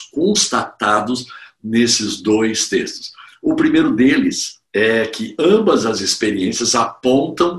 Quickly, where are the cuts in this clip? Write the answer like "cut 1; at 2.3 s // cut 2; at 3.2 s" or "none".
cut 1; at 4.7 s